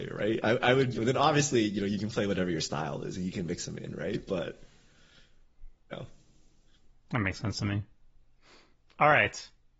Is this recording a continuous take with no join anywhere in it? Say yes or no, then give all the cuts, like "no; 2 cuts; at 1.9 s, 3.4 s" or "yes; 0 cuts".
no; 1 cut; at 0.9 s